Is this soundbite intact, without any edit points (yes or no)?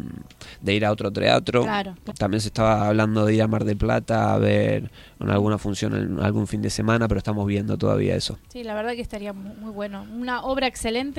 no